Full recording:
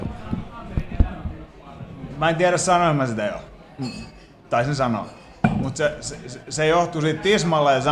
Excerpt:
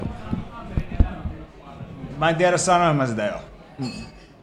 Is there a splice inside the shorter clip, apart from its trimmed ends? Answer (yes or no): no